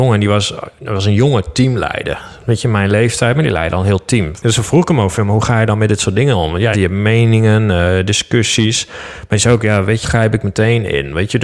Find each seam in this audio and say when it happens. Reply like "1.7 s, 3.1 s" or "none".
4.4 s, 6.7 s, 10.0 s